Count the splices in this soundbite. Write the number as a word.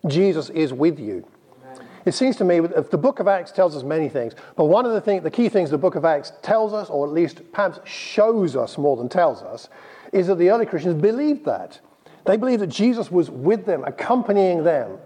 zero